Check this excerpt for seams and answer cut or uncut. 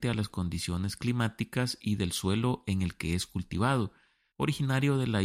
cut